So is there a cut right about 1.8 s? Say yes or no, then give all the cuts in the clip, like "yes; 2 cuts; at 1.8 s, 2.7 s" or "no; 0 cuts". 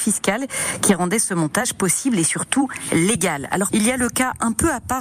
no; 1 cut; at 3.7 s